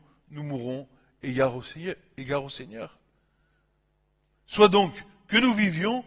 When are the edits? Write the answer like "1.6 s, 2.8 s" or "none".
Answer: none